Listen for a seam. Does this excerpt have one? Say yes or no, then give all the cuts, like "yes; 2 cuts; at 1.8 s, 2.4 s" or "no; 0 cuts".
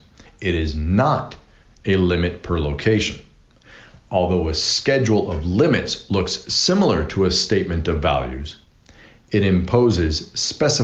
no; 0 cuts